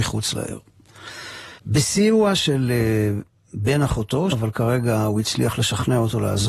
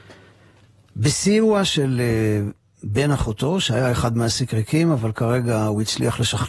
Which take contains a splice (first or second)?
first